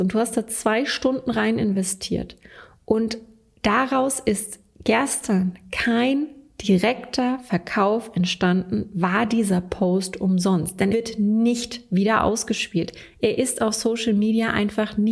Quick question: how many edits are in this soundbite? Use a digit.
1